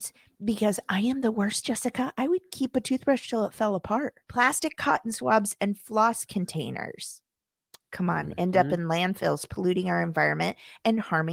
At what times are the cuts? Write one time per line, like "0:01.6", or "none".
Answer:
0:04.2